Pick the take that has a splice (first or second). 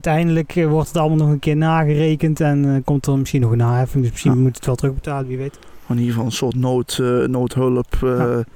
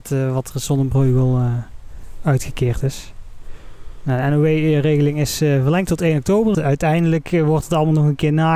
second